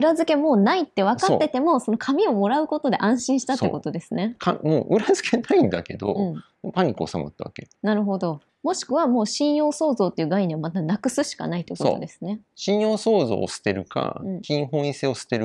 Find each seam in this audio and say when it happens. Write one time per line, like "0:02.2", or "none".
0:08.5